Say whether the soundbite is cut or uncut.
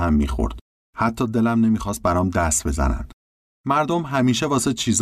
uncut